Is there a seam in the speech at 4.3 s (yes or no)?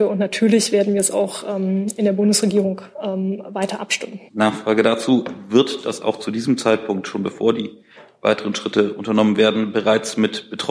yes